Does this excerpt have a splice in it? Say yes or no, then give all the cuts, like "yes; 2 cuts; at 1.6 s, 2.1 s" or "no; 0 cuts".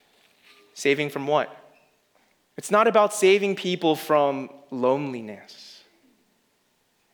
yes; 1 cut; at 2.4 s